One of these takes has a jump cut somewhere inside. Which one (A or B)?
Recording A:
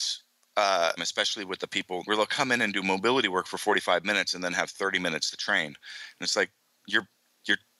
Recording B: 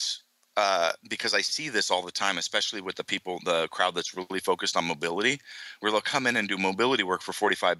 A